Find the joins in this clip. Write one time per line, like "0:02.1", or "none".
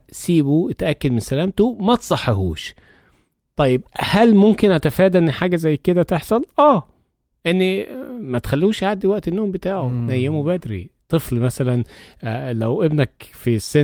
none